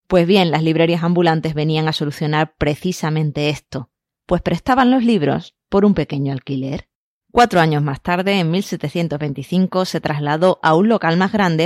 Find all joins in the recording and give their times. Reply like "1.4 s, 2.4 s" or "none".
7.2 s